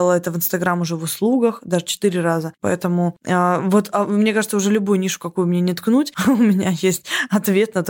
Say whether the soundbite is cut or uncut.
cut